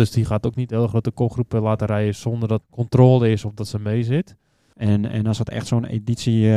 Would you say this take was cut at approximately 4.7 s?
yes; 2 cuts; at 2.6 s, 4.7 s

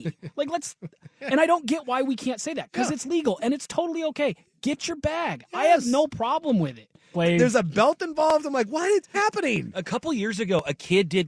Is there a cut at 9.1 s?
yes; 2 cuts; at 7.1 s, 9.1 s

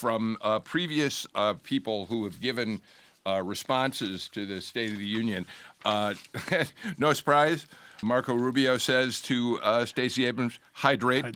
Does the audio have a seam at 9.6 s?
no; 1 cut; at 8.0 s

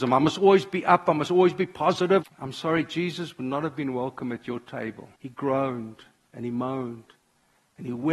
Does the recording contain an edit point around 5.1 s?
yes; 2 cuts; at 2.2 s, 5.1 s

